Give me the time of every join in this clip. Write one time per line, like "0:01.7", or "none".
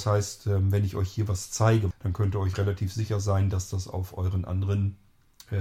0:01.9